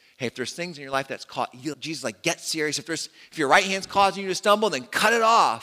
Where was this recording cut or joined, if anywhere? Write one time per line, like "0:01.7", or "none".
0:01.7